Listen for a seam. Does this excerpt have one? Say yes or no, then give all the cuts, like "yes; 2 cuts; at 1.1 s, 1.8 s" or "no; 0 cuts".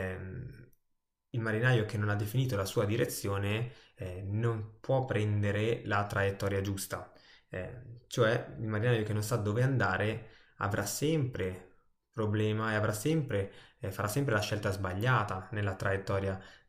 no; 0 cuts